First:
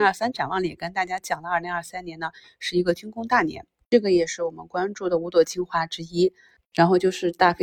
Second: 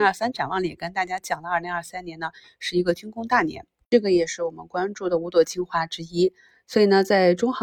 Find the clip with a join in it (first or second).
first